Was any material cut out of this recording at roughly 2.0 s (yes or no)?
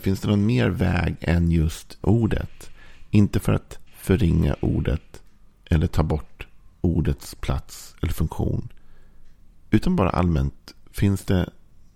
yes